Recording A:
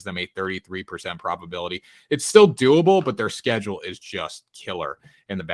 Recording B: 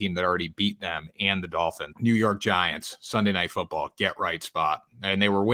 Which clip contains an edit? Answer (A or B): B